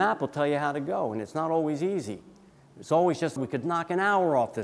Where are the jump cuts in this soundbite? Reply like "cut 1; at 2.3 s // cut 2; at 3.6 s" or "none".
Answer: cut 1; at 3.4 s